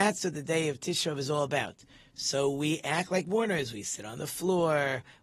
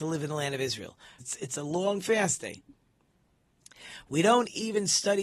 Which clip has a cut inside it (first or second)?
second